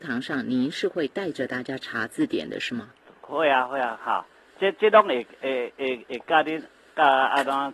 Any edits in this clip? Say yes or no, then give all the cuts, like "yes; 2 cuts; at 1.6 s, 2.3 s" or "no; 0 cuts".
no; 0 cuts